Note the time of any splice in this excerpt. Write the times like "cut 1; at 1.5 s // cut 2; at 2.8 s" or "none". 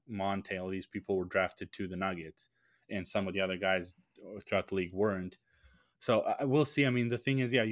none